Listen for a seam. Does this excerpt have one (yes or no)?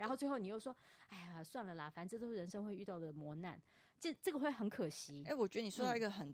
no